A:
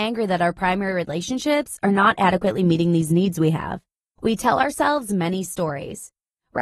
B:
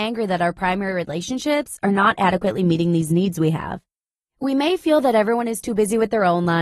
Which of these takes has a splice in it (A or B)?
A